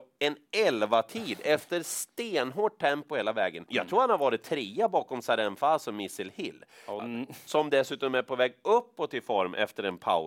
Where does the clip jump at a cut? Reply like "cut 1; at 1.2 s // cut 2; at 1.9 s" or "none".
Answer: cut 1; at 3.7 s // cut 2; at 7.0 s